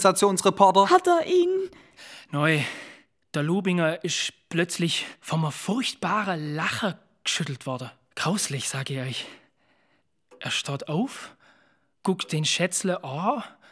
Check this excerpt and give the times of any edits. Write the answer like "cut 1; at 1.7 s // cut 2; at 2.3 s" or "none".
none